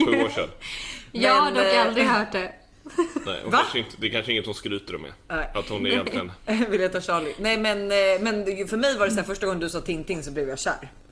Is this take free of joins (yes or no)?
yes